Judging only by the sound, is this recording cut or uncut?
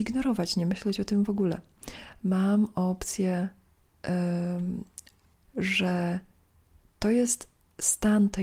cut